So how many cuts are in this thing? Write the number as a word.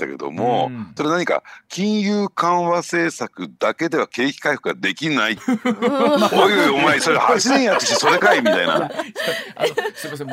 one